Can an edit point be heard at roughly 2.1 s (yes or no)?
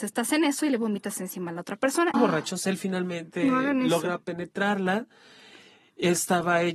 yes